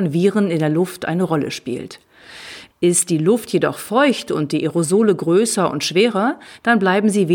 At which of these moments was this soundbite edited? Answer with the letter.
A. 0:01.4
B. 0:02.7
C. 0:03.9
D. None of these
B